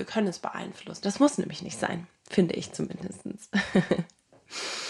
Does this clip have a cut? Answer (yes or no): yes